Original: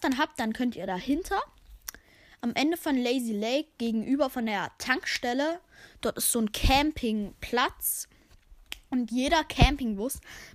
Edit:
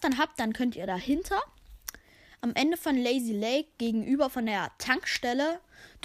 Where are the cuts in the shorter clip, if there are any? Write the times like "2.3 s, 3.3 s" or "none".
none